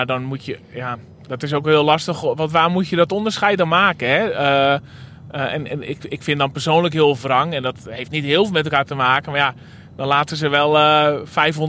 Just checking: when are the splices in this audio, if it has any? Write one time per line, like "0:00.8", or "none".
none